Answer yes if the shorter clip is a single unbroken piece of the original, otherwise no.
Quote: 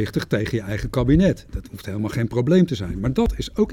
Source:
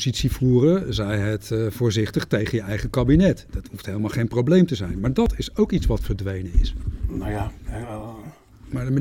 yes